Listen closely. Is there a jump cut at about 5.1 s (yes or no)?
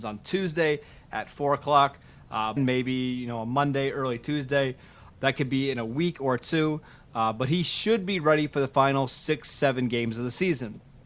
yes